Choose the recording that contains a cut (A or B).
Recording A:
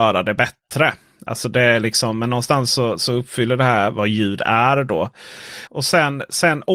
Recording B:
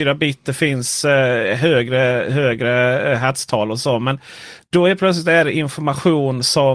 A